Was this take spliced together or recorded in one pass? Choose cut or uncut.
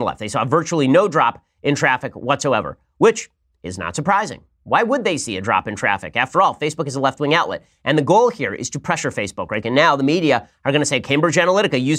cut